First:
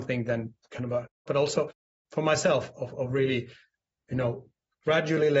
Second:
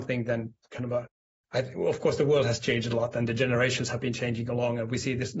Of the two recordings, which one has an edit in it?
first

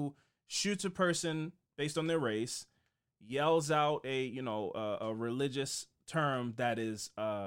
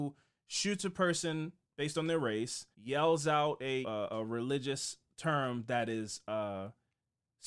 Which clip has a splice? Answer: second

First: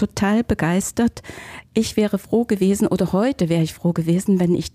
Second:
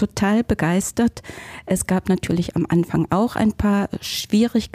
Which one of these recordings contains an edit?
first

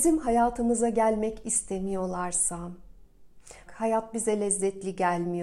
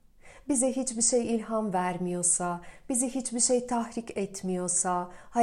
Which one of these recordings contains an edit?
first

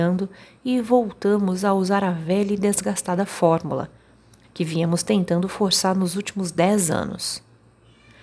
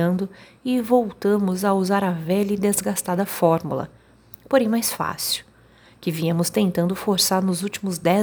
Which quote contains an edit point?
first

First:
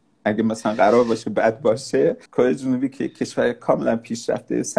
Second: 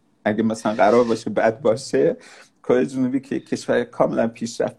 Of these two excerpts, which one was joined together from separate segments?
first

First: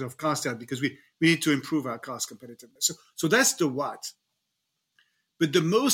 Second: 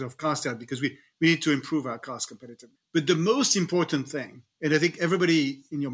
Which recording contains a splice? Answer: second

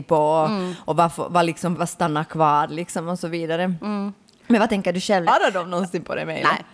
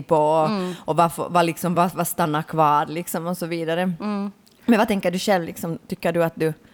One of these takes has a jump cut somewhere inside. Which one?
first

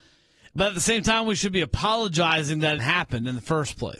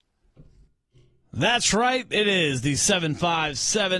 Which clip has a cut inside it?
first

